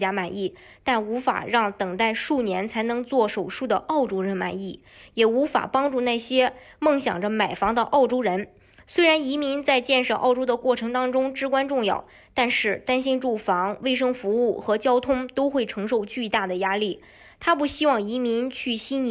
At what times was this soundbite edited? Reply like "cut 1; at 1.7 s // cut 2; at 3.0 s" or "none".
none